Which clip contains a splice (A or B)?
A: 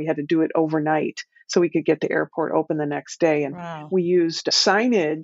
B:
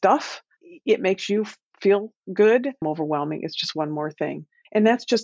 B